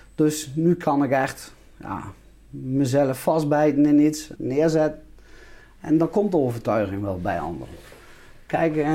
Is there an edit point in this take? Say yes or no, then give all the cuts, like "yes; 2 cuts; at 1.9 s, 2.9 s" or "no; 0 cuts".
yes; 1 cut; at 4.4 s